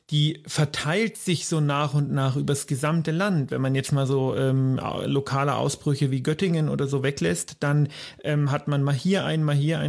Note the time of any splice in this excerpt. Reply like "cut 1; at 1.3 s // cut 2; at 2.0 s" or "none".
none